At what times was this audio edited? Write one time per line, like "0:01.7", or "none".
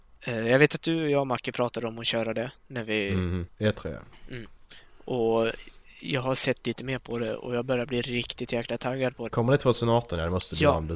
0:03.5
0:09.3